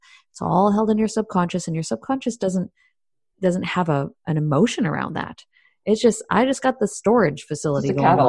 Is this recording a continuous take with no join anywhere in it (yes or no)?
yes